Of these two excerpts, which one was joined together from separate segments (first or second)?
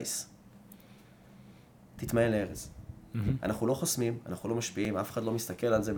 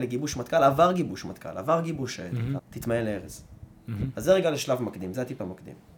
second